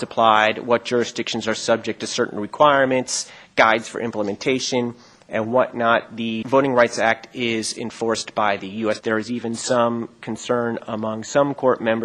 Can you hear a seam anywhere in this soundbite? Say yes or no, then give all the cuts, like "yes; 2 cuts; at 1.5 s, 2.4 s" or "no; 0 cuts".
yes; 2 cuts; at 6.4 s, 9.0 s